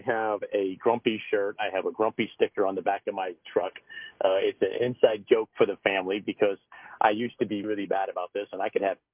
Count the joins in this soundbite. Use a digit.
1